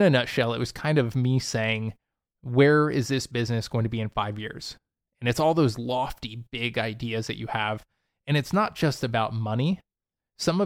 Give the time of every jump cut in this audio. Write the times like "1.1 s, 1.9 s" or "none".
none